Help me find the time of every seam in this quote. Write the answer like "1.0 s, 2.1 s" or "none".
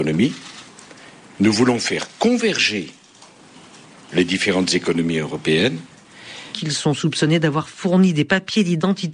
6.5 s